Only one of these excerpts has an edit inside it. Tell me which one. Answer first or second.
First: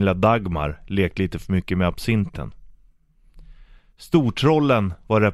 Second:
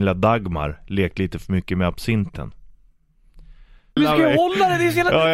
second